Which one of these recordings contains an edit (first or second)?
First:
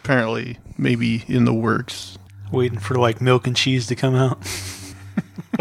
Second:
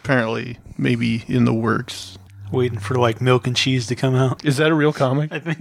second